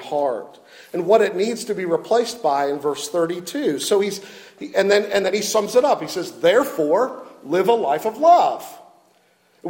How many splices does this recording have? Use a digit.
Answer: 0